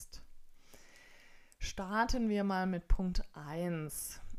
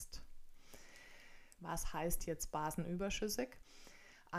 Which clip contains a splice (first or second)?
second